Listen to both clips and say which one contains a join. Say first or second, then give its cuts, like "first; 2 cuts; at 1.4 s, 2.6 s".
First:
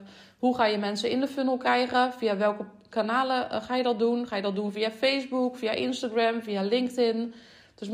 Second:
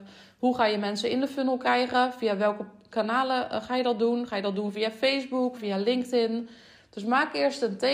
second; 1 cut; at 5.6 s